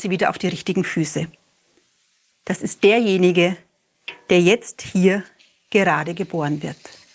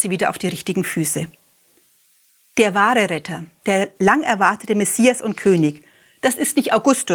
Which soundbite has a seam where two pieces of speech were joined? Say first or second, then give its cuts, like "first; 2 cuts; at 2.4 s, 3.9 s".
first; 1 cut; at 2.3 s